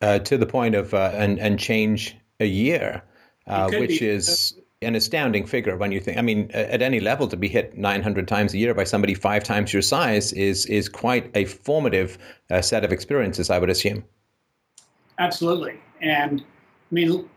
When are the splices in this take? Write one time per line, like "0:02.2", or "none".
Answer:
0:01.1
0:04.8